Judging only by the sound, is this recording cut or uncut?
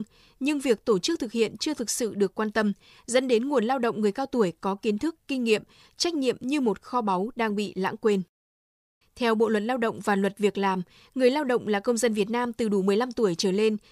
cut